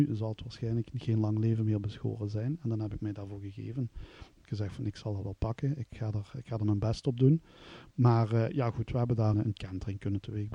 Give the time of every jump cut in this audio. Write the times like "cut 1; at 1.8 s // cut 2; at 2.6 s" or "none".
cut 1; at 7.9 s // cut 2; at 9.3 s